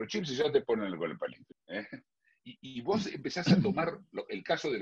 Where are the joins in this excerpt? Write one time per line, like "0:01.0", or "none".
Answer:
0:01.5